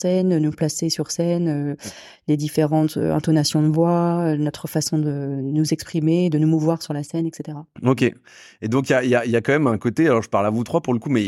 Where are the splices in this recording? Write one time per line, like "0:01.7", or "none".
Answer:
none